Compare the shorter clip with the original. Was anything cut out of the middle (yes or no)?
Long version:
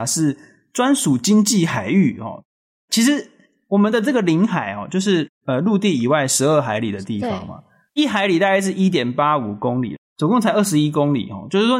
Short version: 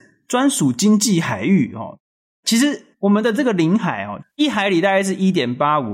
yes